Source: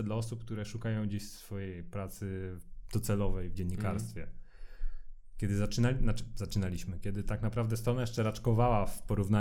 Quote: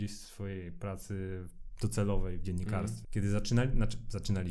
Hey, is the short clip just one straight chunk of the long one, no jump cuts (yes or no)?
no